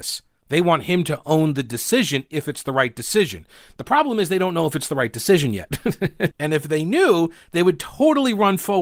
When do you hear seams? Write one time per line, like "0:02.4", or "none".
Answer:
0:06.3